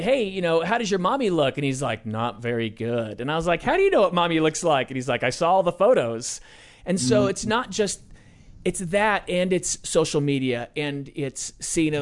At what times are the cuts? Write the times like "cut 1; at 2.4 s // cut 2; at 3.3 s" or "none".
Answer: none